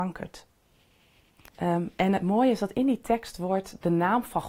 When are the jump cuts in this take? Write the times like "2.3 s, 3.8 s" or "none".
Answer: 1.5 s